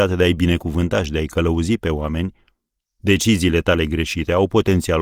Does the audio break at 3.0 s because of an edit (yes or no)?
no